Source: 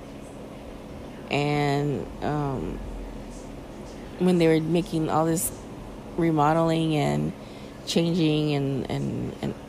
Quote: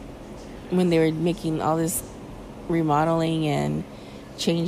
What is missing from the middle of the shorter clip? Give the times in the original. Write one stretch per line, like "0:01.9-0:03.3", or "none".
none

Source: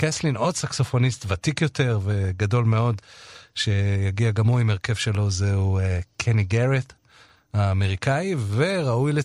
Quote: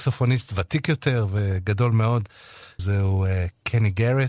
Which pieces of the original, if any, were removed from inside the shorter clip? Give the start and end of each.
0:03.5-0:05.3

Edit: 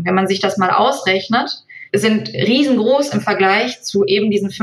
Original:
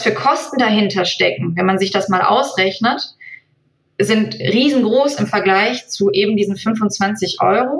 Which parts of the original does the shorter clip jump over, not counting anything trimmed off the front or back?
0:03.4-0:03.9

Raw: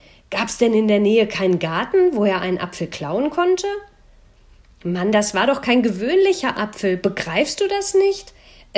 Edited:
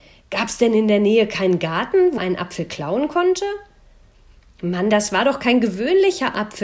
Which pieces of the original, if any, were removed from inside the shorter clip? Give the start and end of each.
0:02.2-0:02.4

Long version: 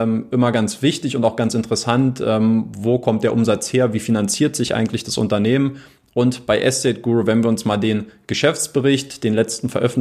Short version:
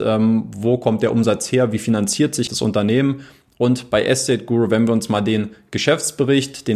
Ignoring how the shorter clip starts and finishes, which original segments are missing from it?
0:04.7-0:05.0

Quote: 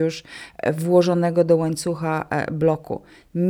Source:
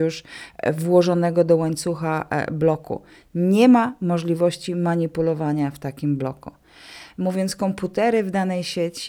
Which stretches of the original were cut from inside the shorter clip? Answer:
none

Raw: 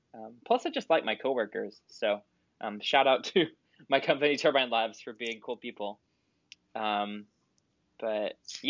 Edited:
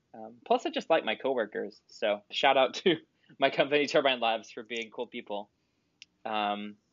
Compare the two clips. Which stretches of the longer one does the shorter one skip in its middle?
0:02.3-0:02.8

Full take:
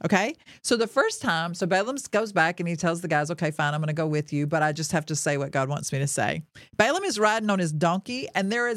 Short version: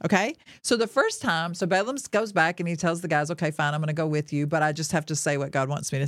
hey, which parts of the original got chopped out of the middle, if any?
none

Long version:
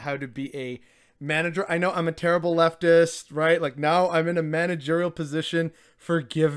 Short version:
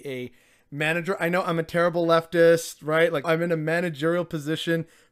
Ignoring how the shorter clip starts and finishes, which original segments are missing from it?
0:03.7-0:04.1

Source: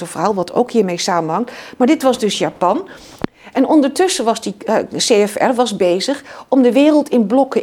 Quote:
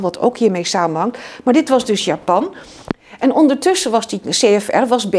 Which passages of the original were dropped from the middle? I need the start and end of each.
0:04.6-0:04.9

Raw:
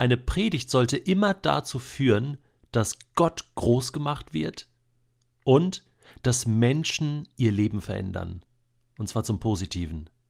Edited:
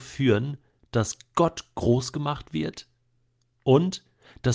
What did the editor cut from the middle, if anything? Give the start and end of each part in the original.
none

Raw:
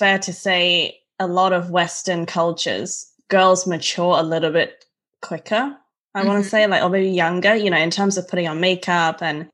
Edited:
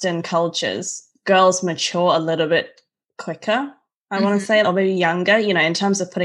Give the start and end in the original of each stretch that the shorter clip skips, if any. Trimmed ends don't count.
0:06.7-0:06.8

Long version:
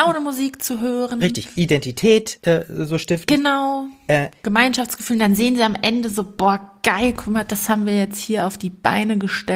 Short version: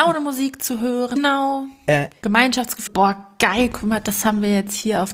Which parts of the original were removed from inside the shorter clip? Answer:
0:01.2-0:03.4
0:05.1-0:06.3

